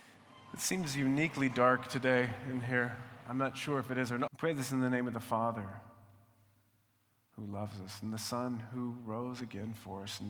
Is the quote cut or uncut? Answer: cut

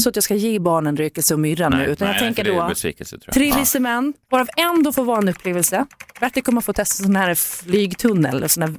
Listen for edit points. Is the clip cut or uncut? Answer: cut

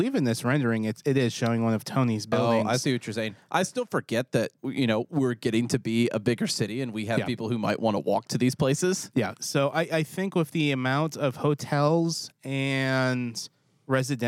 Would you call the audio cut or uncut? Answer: cut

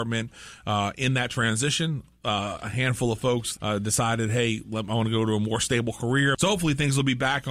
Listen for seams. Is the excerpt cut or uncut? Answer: cut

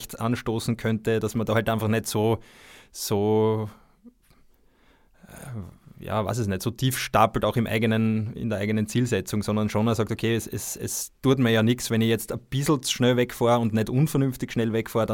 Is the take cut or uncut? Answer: uncut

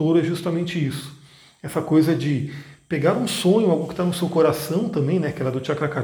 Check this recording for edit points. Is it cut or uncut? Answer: uncut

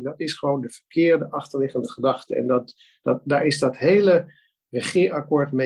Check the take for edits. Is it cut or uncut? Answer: uncut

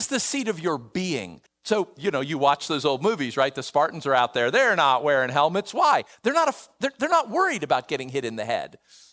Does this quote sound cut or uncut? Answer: cut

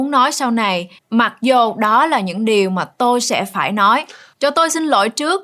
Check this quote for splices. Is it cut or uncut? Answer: cut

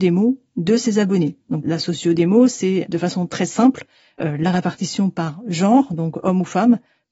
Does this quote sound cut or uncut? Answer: uncut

